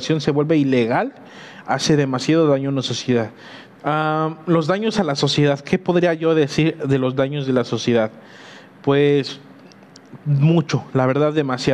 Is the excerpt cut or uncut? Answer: cut